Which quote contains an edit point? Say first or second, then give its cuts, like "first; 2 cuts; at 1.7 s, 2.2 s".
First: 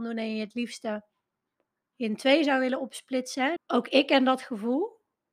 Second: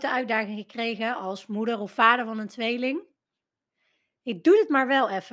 first; 1 cut; at 3.6 s